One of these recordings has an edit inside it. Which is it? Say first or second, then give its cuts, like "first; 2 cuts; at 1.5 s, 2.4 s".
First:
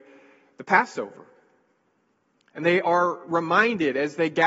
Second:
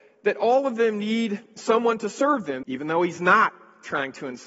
second; 1 cut; at 2.6 s